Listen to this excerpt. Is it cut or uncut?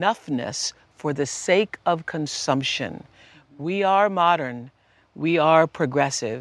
uncut